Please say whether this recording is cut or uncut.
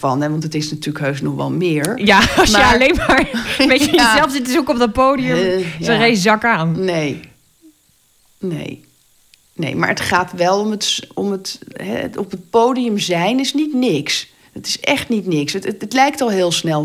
uncut